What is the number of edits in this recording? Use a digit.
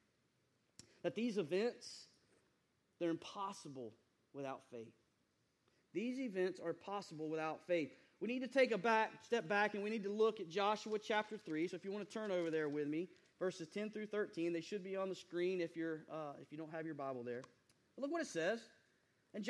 0